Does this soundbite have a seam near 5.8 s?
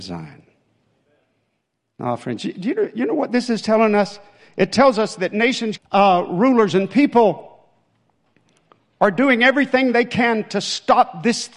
yes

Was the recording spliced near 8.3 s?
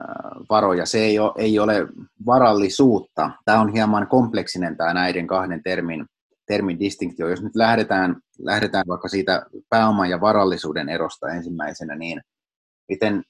no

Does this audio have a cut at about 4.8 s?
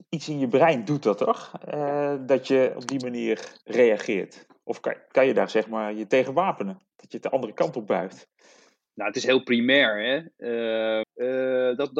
no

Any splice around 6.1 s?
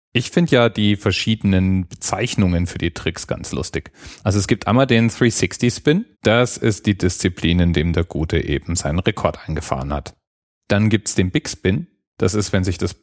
yes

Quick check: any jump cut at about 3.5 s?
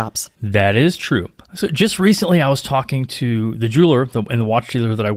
yes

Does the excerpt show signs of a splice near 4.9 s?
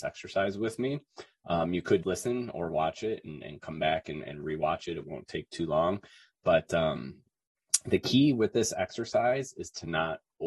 no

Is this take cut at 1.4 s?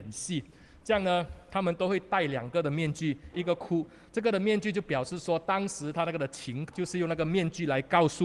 no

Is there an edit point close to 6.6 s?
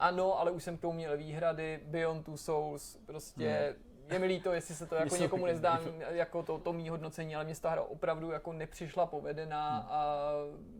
yes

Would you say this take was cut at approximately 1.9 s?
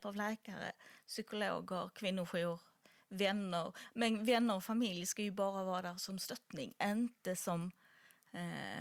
no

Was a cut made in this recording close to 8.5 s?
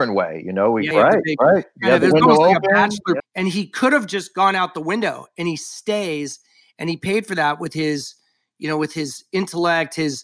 no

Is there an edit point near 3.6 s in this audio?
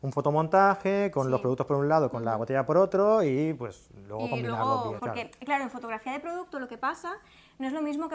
no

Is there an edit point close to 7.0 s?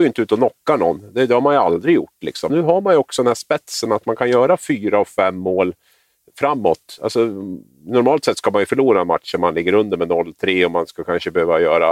no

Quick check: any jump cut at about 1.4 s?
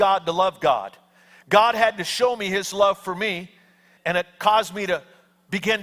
no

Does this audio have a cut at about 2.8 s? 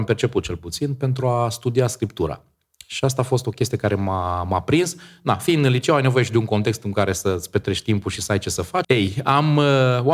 no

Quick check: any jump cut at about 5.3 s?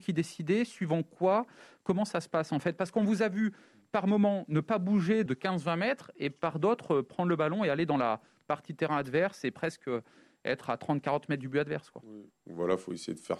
yes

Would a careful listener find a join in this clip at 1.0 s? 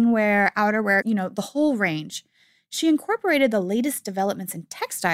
yes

